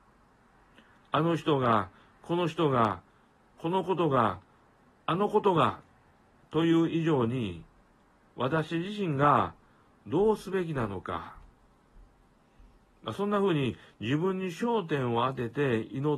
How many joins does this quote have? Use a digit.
1